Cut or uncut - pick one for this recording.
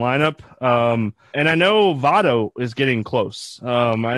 cut